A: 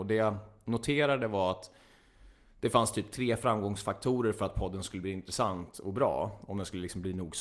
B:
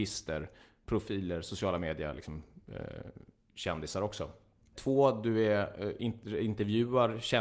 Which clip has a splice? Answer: B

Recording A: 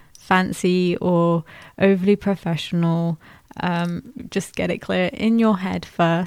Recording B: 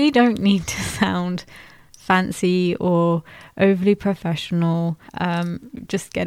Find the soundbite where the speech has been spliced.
B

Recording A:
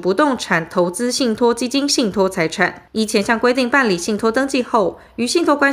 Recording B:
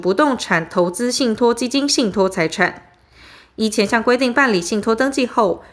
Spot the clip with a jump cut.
A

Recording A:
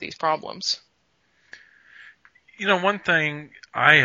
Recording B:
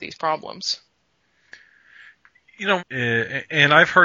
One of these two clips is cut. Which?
B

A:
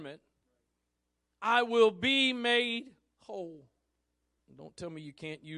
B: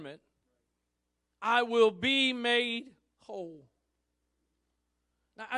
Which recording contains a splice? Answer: A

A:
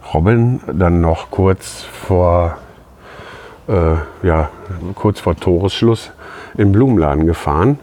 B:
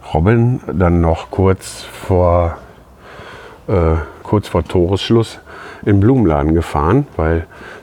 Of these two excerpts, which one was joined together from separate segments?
B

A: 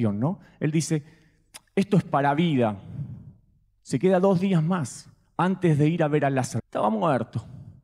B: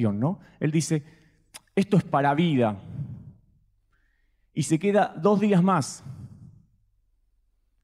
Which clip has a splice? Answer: A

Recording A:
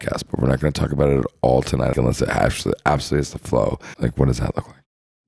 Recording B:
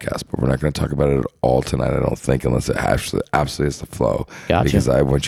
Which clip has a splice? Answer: A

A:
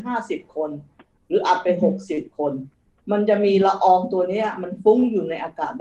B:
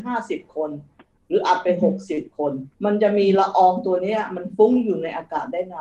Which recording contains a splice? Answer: B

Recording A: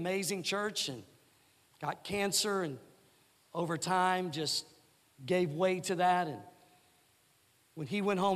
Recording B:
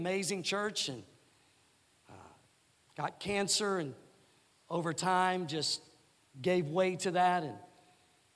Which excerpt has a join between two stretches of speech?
A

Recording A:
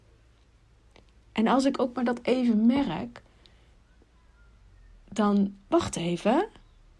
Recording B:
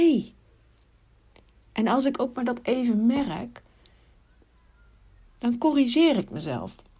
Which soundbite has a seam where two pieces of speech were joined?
B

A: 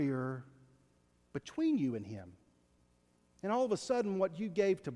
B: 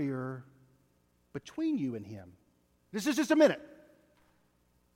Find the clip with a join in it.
B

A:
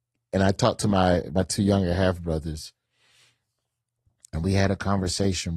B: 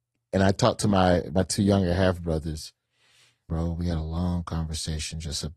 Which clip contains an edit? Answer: B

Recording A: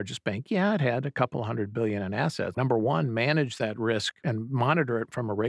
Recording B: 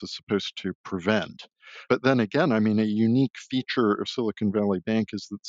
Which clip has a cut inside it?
A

